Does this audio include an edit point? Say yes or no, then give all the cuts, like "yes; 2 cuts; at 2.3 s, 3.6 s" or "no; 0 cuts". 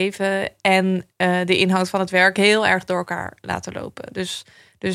no; 0 cuts